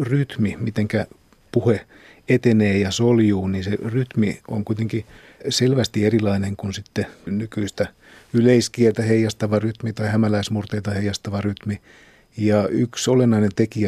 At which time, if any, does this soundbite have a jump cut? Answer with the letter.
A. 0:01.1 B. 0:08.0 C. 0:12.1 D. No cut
D